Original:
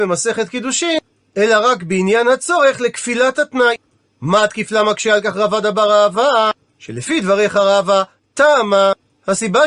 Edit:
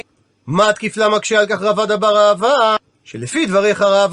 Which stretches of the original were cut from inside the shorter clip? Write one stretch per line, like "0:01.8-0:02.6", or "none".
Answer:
none